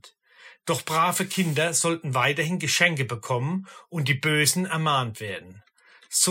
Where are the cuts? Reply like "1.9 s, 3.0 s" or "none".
none

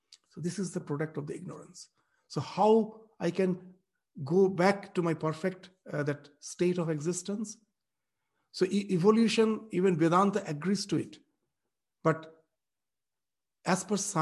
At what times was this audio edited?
none

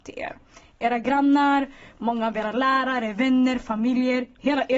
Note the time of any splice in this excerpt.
none

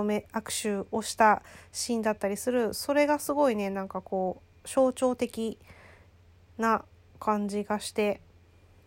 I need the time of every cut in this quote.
none

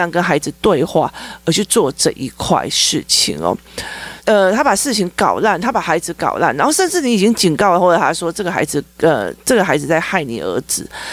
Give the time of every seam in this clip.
4.2 s

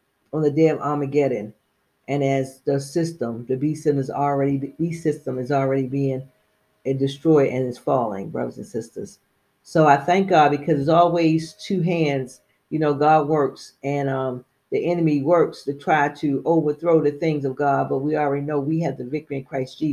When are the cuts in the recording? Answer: none

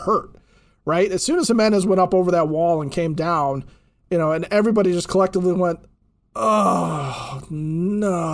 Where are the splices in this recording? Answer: none

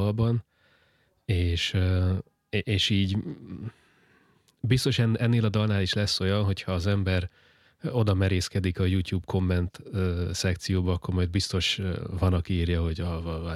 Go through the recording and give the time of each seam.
none

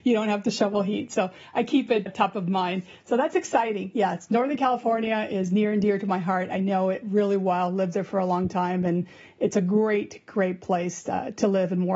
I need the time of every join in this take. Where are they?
none

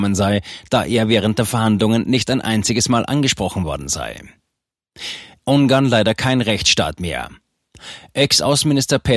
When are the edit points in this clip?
5.4 s

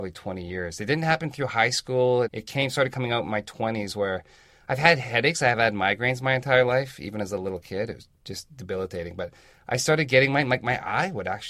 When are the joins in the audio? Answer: 2.2 s

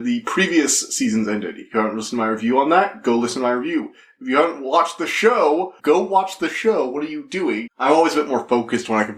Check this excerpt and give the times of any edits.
5.8 s, 7.7 s

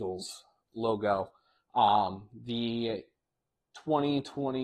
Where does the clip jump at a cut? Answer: none

